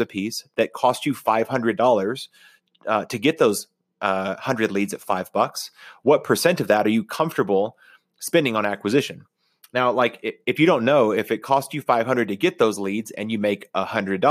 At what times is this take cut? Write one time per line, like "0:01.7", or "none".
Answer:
none